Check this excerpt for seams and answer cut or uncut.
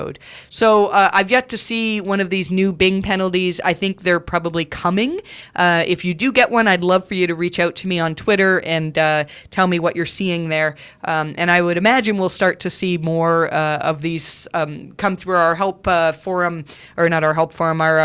uncut